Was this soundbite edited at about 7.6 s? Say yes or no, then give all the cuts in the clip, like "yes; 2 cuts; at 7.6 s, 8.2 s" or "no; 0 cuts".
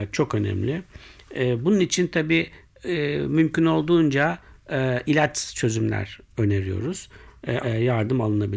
yes; 1 cut; at 7.6 s